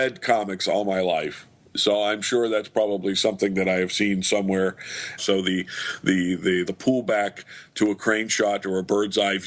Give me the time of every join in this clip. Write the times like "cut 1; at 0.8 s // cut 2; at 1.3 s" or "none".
cut 1; at 5.2 s // cut 2; at 6.6 s